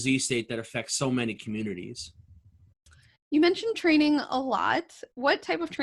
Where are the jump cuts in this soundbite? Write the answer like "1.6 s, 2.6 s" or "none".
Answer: none